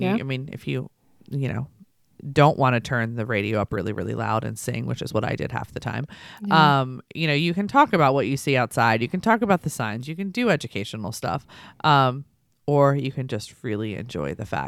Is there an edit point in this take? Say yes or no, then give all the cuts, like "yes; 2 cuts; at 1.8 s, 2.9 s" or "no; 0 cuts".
no; 0 cuts